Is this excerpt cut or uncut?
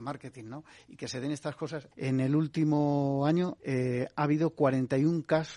cut